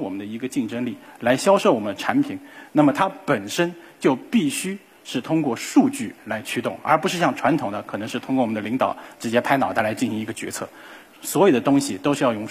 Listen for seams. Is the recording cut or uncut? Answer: uncut